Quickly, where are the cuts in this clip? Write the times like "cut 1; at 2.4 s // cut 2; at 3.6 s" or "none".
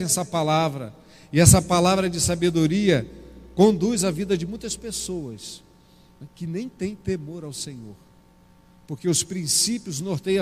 none